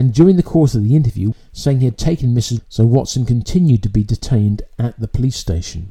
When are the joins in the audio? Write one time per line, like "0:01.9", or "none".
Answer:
0:01.3
0:02.6